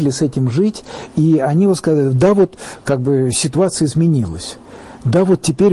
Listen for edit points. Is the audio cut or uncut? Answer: uncut